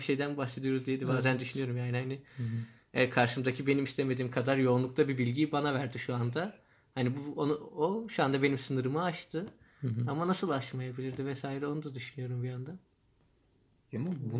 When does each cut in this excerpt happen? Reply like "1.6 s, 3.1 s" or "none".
none